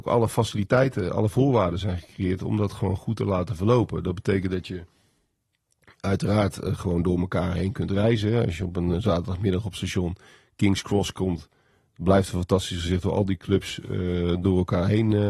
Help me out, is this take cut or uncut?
uncut